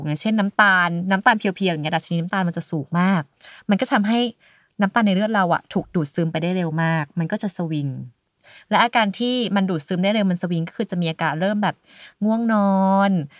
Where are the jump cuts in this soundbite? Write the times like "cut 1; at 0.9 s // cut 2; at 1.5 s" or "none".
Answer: none